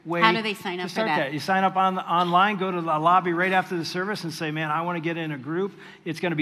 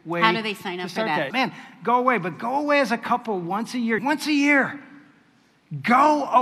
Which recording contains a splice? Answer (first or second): second